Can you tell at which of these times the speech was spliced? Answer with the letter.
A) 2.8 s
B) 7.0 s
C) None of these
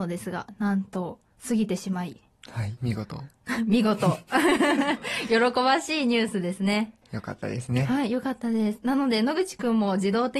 A